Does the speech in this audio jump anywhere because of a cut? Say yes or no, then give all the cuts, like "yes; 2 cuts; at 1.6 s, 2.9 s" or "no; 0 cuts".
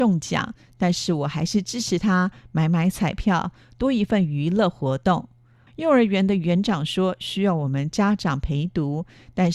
yes; 1 cut; at 5.7 s